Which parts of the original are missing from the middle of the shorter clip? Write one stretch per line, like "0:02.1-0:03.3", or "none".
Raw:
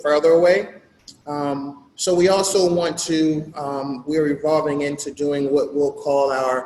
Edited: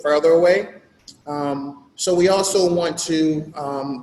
none

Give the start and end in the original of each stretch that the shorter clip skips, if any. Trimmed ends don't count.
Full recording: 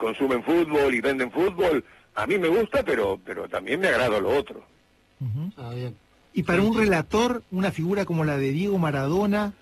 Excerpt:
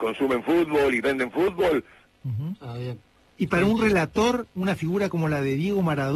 0:02.1-0:05.0

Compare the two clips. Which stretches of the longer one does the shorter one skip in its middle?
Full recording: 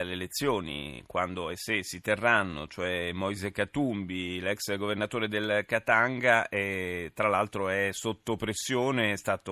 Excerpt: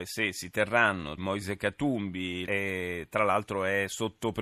0:02.7-0:03.1
0:04.4-0:06.5

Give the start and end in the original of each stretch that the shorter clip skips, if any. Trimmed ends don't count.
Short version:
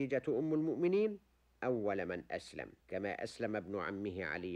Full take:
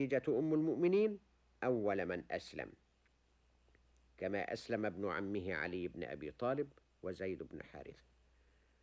0:02.8-0:04.1

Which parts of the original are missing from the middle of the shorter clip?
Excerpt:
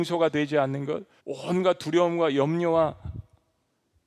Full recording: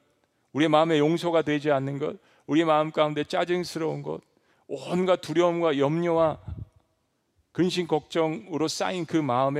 0:02.3-0:04.6

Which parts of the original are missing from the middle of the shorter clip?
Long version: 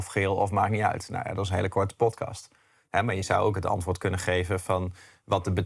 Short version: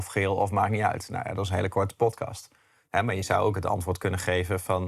none

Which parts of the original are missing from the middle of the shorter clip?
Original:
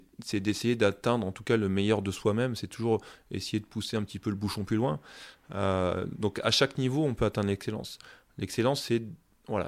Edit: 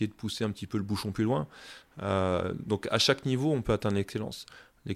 none

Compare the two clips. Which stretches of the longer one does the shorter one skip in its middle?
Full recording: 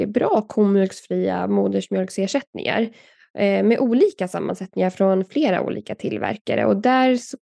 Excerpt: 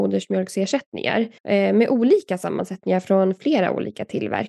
0:03.0-0:03.3

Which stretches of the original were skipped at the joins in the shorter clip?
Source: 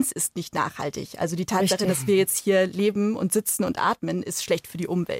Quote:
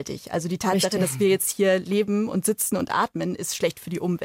none

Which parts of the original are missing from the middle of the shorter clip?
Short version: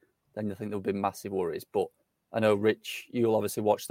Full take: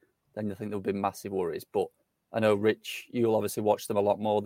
none

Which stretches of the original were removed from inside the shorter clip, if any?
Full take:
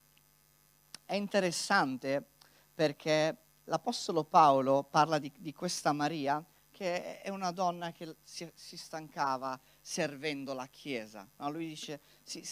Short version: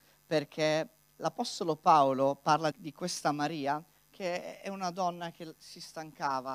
0:05.2-0:05.3
0:08.2-0:08.5

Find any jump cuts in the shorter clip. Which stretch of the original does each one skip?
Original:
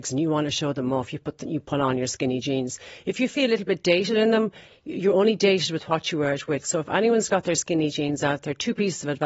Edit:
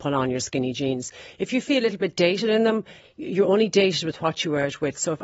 none

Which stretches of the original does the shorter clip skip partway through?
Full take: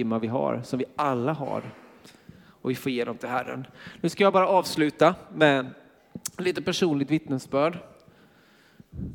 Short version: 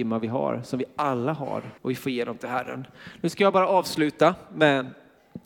0:01.8-0:02.6

